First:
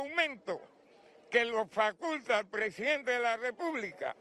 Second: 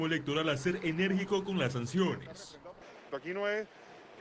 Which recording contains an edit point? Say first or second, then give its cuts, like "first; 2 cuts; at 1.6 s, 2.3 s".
second; 1 cut; at 3.1 s